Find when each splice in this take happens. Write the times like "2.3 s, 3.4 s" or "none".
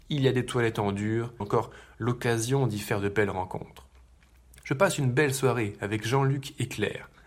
1.4 s